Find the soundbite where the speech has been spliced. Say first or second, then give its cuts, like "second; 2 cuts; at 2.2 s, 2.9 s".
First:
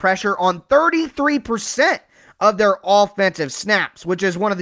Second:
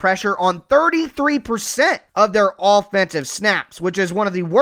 second; 1 cut; at 2.1 s